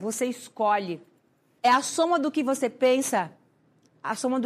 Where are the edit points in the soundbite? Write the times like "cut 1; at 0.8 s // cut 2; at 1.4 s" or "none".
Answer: cut 1; at 1.6 s

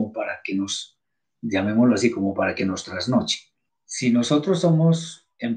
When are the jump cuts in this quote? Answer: cut 1; at 3.7 s

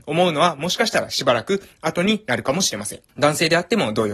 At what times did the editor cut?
cut 1; at 3.1 s

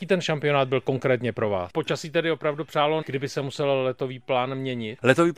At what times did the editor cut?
cut 1; at 1.7 s // cut 2; at 3.0 s

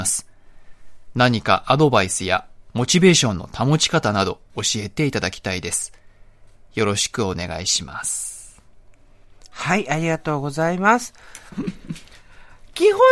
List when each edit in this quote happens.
cut 1; at 11.5 s

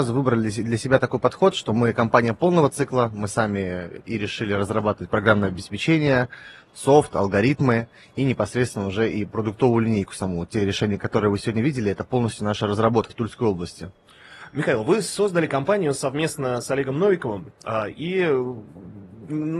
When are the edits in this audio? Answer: cut 1; at 13.1 s

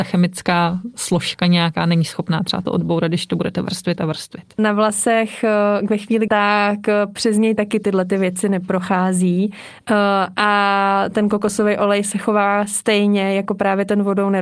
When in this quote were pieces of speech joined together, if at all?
cut 1; at 4.6 s // cut 2; at 6.3 s

